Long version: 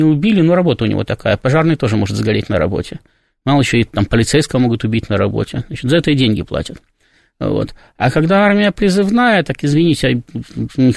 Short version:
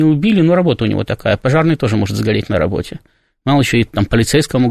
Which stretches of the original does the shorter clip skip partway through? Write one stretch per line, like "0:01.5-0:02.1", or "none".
none